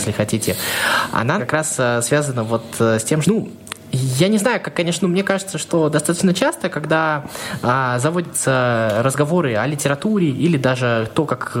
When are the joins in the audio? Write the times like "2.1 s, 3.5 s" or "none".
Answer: 1.4 s, 3.2 s, 5.0 s

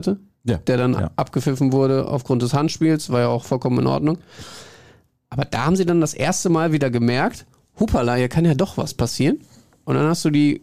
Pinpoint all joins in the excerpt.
none

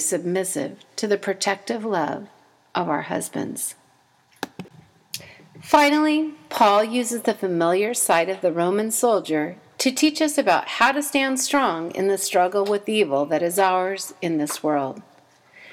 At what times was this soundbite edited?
none

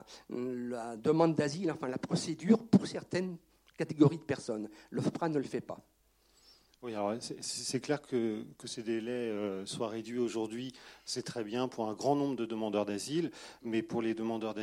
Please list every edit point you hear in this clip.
none

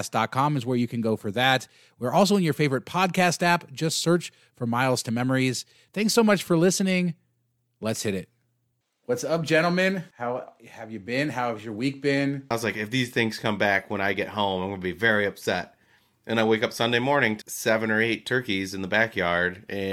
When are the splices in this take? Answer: 12.5 s, 17.4 s

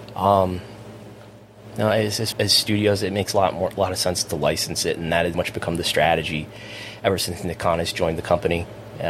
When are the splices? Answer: 2.3 s, 5.3 s

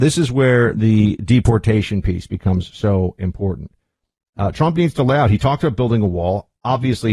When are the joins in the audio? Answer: none

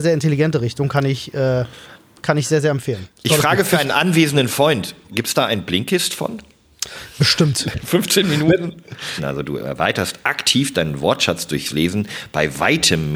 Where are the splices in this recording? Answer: 9.2 s

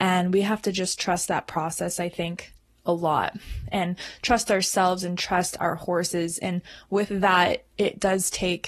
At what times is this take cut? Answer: none

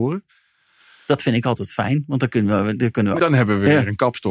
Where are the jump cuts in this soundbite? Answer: 3.2 s

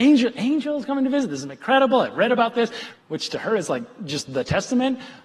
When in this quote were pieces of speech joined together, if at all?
2.9 s

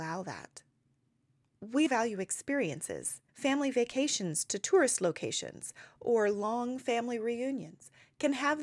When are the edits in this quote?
1.9 s, 3.3 s

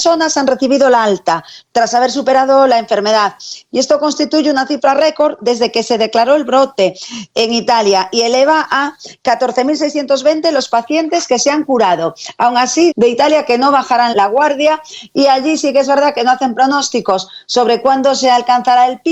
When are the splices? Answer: 12.9 s, 14.1 s

